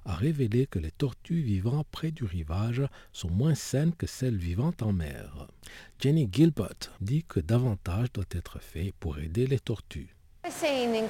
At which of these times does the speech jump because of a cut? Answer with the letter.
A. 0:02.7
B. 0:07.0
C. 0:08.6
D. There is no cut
B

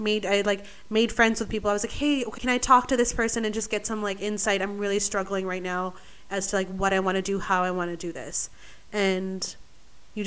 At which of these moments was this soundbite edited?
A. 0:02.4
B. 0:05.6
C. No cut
A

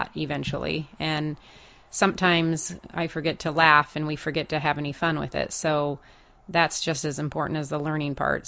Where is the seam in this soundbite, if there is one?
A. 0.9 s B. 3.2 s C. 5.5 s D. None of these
D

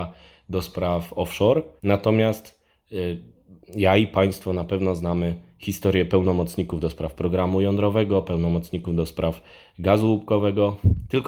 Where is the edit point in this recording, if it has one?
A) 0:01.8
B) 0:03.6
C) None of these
A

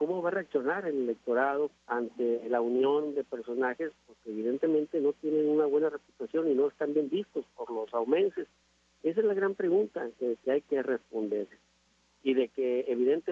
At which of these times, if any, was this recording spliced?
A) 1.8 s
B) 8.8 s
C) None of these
A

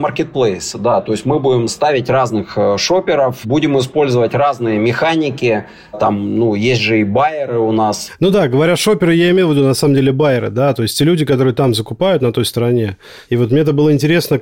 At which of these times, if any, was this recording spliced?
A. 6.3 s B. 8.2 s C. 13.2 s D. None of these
D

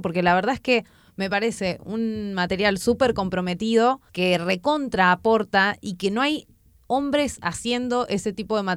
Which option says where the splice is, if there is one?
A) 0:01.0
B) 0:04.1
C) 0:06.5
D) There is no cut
B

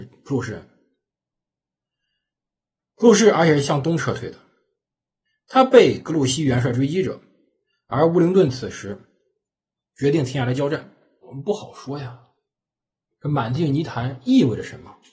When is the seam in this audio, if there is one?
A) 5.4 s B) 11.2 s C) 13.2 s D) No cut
B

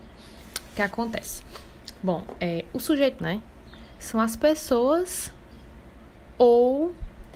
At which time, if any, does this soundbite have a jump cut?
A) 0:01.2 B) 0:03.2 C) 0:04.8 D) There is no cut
B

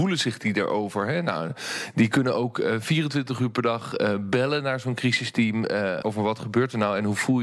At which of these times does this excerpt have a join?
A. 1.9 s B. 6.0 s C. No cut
B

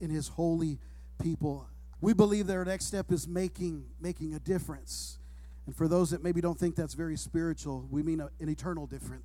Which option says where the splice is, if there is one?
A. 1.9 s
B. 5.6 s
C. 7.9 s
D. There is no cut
A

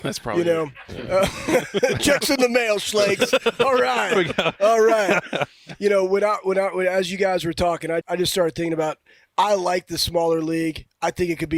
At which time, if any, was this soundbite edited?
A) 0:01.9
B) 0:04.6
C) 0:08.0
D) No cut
C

